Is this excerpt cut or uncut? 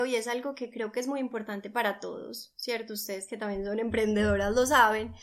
uncut